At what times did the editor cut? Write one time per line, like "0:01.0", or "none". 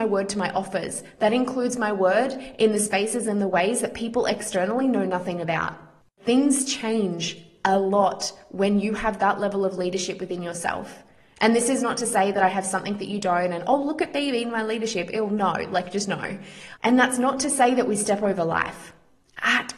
0:16.8